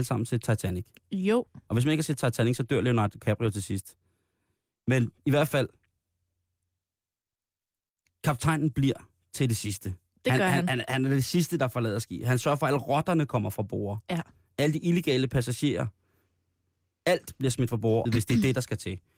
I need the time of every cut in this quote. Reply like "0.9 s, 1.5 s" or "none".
18.0 s